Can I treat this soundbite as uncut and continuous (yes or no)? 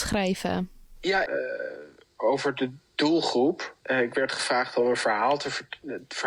no